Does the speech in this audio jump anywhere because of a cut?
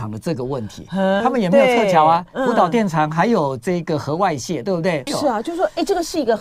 yes; 2 cuts; at 1.2 s, 5.1 s

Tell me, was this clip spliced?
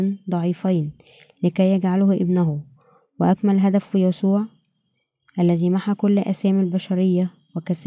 no; 0 cuts

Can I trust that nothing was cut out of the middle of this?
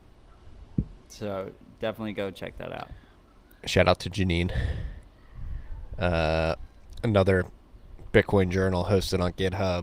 yes; 0 cuts

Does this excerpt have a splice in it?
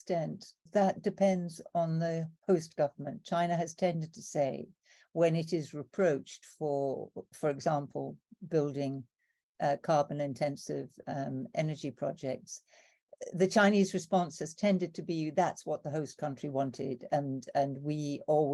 no; 0 cuts

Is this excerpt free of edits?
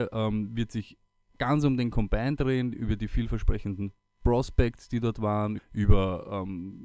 no; 1 cut; at 5.6 s

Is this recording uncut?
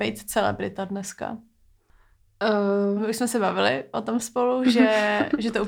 no; 1 cut; at 3.0 s

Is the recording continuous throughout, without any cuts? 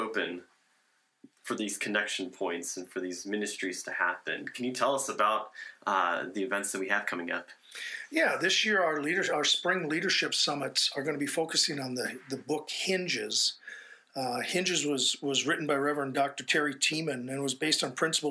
yes; 0 cuts

